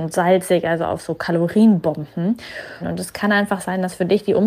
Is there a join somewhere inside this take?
yes; 1 cut; at 2.8 s

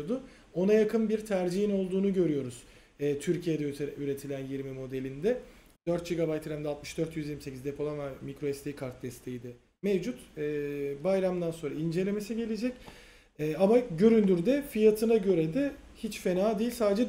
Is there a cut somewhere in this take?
yes; 1 cut; at 5.7 s

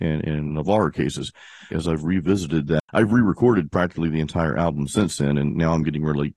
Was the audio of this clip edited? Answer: yes; 1 cut; at 1.7 s

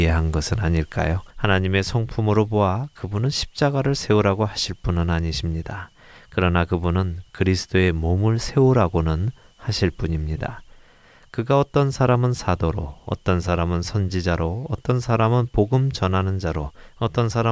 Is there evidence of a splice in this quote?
yes; 1 cut; at 1.3 s

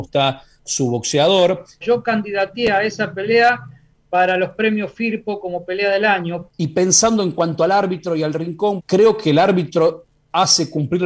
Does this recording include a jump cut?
yes; 3 cuts; at 1.8 s, 6.5 s, 8.8 s

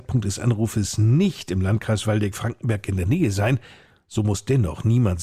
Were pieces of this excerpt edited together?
no; 0 cuts

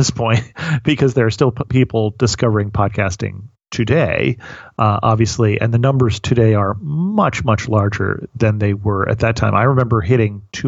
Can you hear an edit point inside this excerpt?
no; 0 cuts

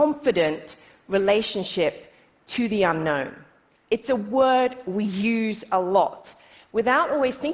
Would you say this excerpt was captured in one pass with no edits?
no; 1 cut; at 3.7 s

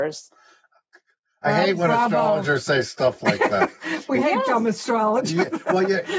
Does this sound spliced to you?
no; 0 cuts

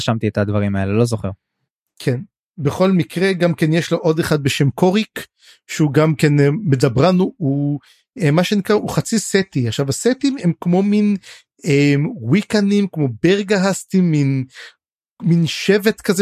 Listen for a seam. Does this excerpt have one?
no; 0 cuts

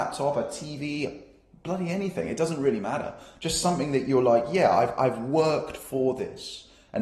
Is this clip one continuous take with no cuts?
yes; 0 cuts

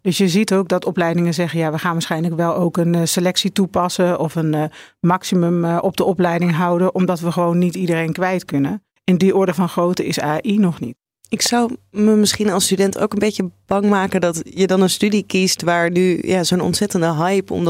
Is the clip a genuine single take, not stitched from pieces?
no; 1 cut; at 9.0 s

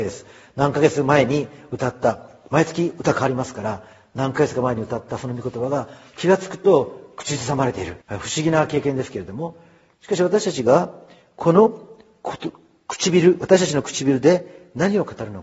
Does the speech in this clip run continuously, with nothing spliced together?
no; 1 cut; at 8.0 s

